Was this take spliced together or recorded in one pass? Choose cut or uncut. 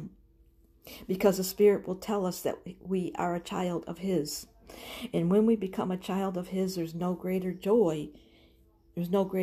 uncut